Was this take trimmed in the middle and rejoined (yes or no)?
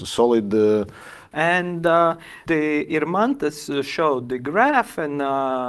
yes